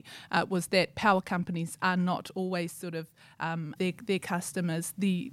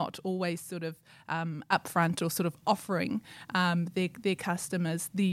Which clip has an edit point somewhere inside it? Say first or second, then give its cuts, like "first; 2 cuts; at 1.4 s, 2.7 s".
first; 1 cut; at 3.8 s